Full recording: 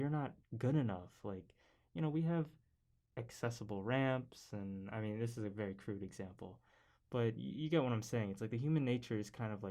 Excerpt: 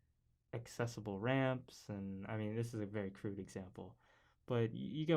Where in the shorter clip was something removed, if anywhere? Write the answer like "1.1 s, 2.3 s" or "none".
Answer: none